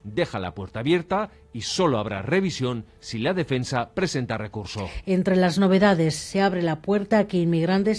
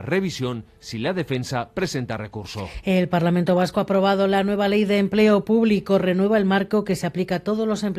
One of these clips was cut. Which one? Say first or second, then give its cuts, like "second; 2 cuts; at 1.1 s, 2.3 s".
first; 1 cut; at 5.0 s